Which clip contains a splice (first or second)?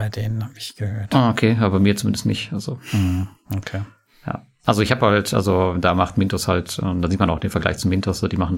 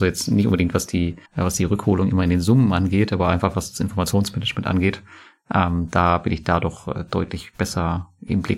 second